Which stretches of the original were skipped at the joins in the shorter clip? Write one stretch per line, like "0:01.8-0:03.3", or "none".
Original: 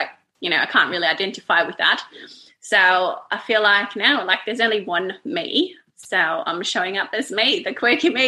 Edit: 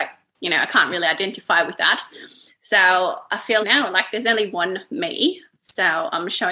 0:03.6-0:03.9